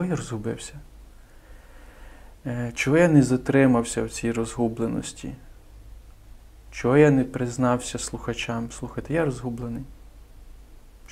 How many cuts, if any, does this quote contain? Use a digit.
0